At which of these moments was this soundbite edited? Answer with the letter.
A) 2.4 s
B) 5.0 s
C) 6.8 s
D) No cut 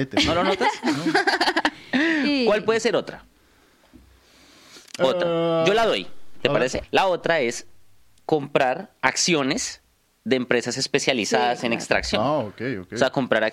C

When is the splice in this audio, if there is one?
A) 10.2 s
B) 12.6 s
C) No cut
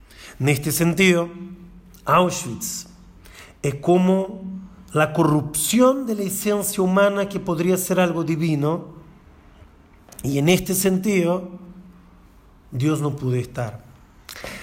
C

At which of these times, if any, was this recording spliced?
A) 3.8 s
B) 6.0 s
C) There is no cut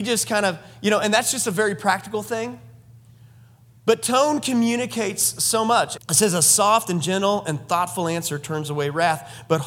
B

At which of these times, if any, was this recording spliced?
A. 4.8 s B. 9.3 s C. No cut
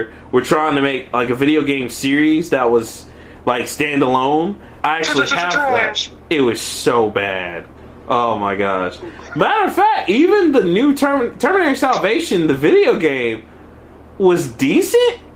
A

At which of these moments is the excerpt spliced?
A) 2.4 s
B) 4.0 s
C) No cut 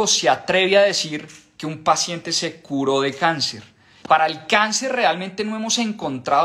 B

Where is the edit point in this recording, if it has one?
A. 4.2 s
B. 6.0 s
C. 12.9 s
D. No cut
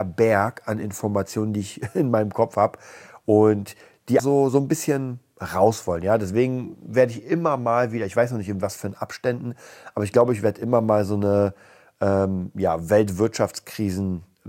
A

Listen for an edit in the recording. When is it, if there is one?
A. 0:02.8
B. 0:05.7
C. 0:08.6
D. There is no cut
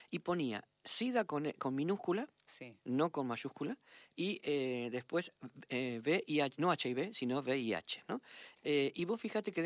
C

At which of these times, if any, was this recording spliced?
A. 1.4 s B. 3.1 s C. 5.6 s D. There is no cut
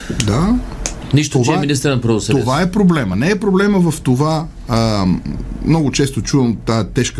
D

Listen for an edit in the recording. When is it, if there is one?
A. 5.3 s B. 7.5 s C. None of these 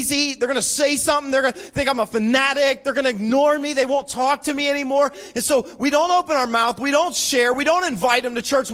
C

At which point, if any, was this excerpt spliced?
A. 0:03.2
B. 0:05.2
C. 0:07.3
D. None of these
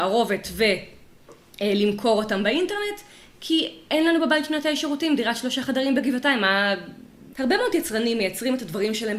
C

